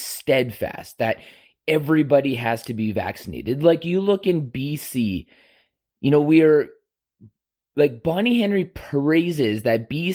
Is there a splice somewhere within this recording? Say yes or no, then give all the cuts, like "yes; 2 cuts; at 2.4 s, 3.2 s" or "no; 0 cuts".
no; 0 cuts